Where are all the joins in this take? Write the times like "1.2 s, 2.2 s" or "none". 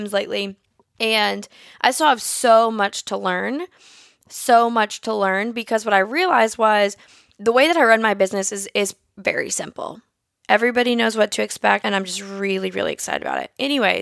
10.4 s, 11.8 s

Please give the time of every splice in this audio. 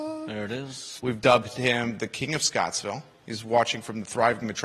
1.0 s

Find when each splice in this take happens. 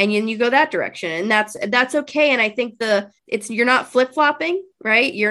3.2 s

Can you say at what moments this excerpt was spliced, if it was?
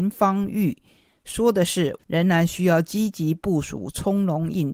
2.0 s

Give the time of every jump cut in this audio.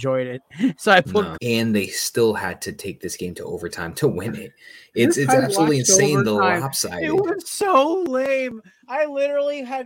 1.4 s

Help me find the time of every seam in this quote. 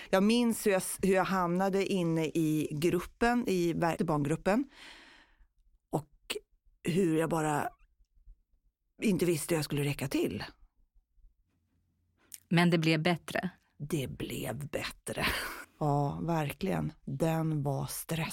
4.0 s, 15.6 s

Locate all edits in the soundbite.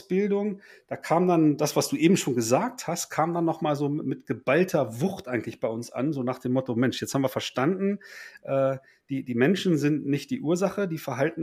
none

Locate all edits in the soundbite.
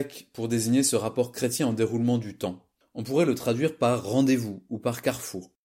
2.8 s

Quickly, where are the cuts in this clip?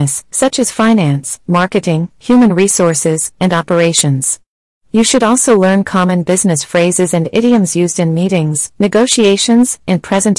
none

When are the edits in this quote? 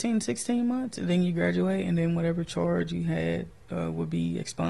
none

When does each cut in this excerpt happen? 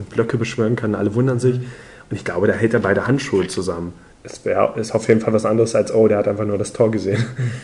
4.1 s

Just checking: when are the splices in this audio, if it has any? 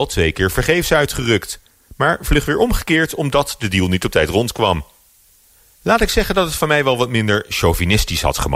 none

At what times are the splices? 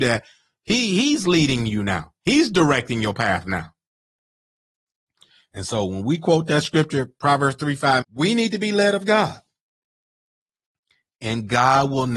8.0 s

